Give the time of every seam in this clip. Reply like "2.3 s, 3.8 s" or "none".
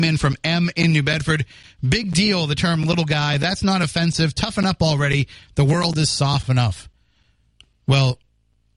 none